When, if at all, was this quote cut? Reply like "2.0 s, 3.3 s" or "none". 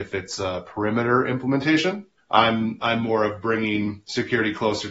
2.2 s